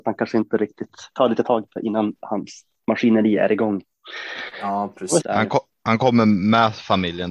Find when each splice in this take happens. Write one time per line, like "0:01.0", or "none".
0:05.2

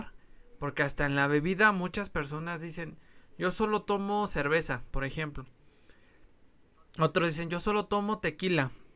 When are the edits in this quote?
none

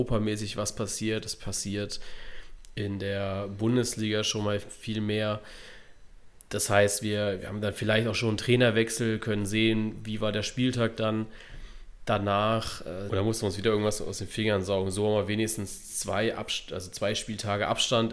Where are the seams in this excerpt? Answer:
0:13.1

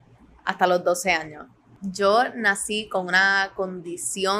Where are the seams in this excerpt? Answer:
0:01.7

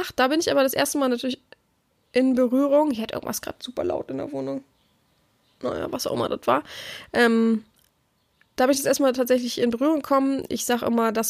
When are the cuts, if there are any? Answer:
none

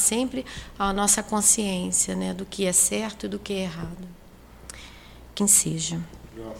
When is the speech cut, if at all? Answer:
0:05.4

